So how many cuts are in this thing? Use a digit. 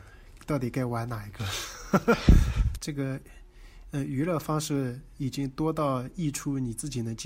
1